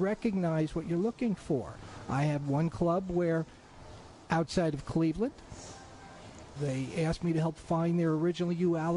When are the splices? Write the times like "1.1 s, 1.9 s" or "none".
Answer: 6.6 s